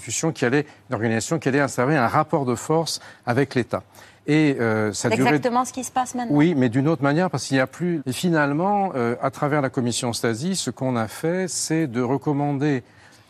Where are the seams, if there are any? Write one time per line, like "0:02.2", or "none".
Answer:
0:07.0
0:08.0